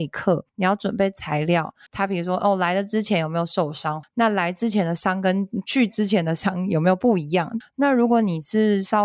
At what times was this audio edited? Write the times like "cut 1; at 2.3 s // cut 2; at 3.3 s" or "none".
cut 1; at 1.9 s // cut 2; at 4.0 s // cut 3; at 7.6 s